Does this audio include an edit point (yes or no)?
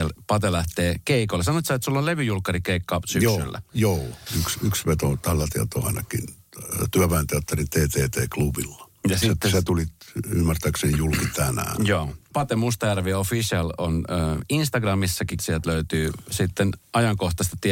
yes